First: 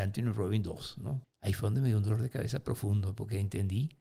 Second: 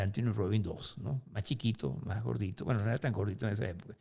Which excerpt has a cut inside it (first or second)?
first